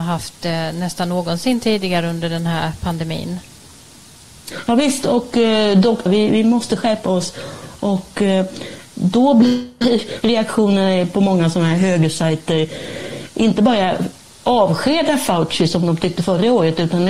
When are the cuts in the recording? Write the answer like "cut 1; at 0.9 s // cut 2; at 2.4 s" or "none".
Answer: cut 1; at 6.1 s